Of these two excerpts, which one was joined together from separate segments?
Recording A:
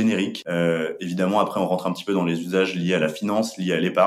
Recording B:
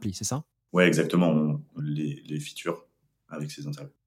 B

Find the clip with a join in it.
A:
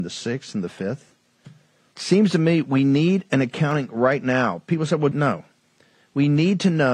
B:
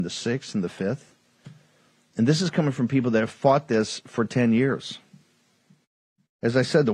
A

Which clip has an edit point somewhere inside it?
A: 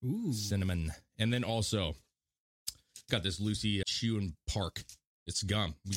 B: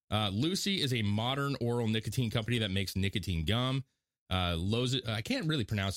A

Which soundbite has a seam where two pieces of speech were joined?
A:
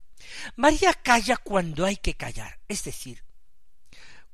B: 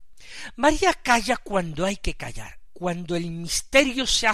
B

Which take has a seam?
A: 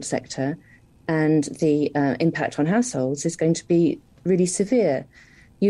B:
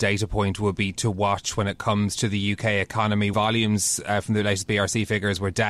B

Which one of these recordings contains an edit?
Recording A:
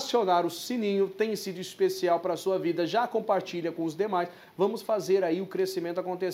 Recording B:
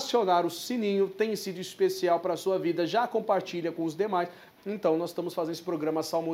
B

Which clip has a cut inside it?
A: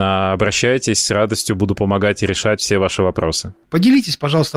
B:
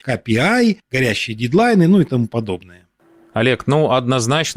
A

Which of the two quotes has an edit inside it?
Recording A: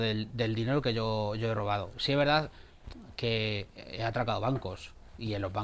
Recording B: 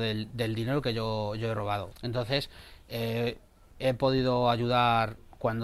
B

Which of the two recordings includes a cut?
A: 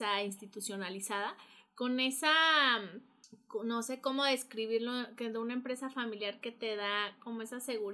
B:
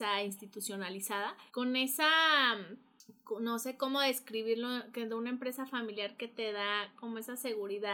B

